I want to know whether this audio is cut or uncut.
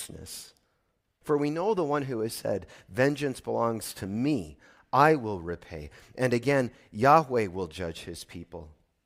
cut